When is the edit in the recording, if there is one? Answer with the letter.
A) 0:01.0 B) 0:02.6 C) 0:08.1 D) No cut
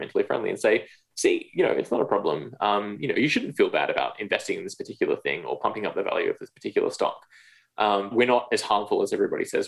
C